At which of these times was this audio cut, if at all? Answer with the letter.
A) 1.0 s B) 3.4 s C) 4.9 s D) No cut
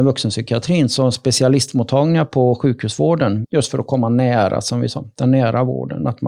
B